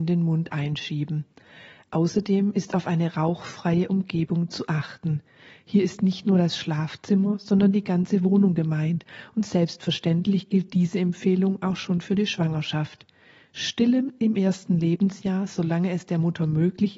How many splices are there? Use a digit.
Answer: 0